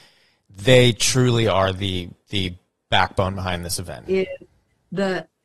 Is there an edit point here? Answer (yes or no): yes